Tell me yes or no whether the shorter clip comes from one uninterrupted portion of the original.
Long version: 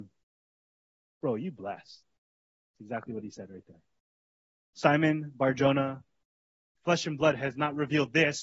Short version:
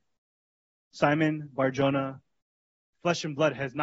yes